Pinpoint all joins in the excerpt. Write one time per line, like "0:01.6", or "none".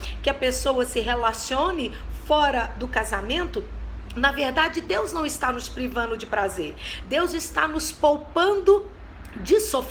none